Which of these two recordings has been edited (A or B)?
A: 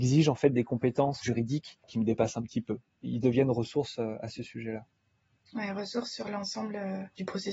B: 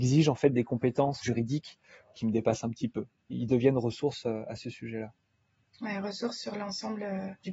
A